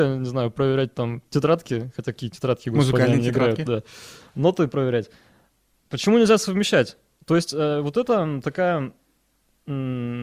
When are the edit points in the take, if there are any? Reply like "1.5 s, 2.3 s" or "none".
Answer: none